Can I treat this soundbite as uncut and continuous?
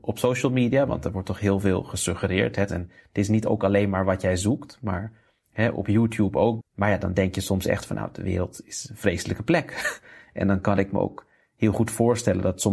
no; 2 cuts; at 2.7 s, 6.6 s

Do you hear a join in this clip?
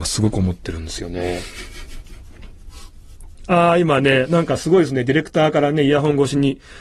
no; 0 cuts

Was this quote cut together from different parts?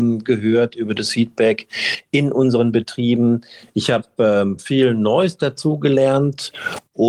no; 0 cuts

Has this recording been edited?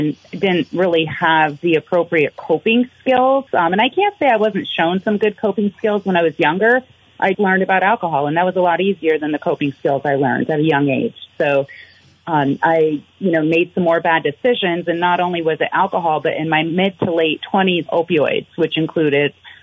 yes; 2 cuts; at 7.3 s, 17.9 s

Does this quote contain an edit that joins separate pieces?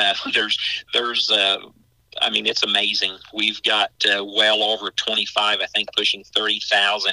no; 0 cuts

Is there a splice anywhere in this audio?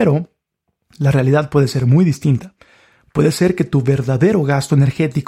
no; 0 cuts

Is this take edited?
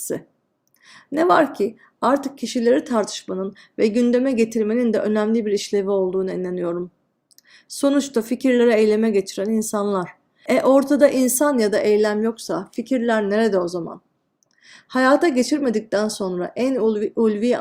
no; 0 cuts

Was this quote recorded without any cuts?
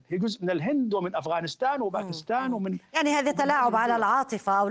yes; 0 cuts

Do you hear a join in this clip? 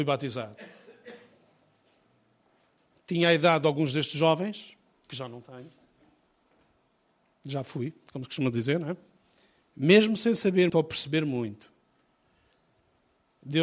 yes; 2 cuts; at 9.6 s, 10.7 s

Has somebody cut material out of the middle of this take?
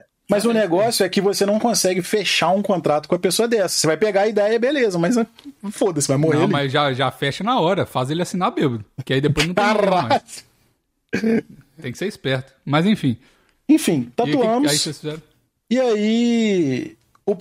no; 0 cuts

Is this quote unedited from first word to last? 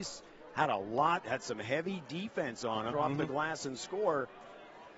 no; 1 cut; at 2.9 s

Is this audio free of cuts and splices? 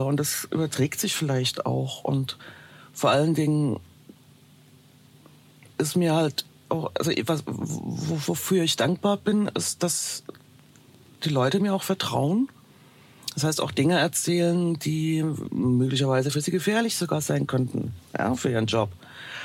yes; 0 cuts

